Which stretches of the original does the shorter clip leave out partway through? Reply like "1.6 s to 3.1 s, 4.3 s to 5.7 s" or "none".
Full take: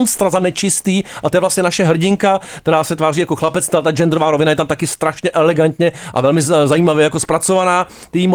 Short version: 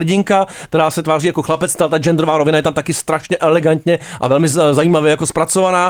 none